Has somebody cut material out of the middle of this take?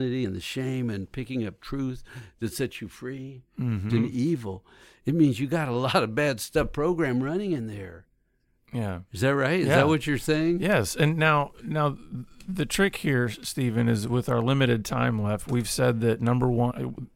yes; 1 cut; at 3.9 s

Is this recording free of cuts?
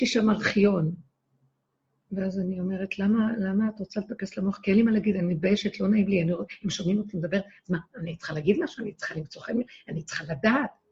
yes; 0 cuts

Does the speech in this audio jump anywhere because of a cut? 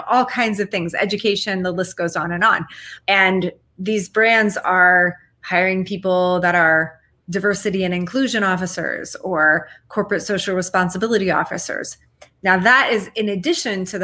yes; 1 cut; at 3.0 s

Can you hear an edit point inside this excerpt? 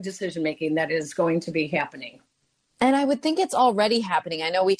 no; 0 cuts

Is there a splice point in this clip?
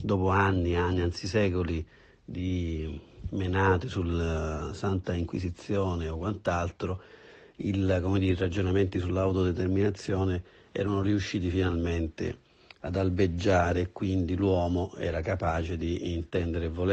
no; 0 cuts

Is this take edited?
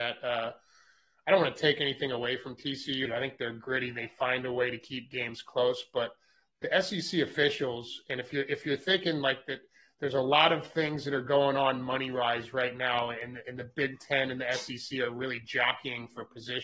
yes; 1 cut; at 3.1 s

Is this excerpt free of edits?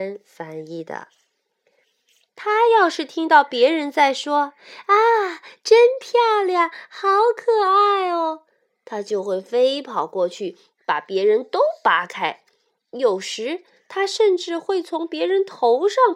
no; 1 cut; at 1.8 s

